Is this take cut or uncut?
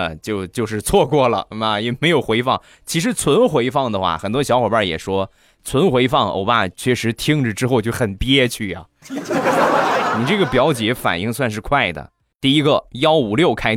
cut